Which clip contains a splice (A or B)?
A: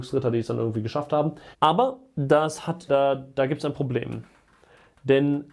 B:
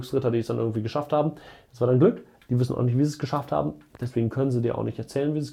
A